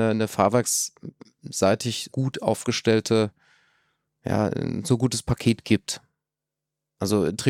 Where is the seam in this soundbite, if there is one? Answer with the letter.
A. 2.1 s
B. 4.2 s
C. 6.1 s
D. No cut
A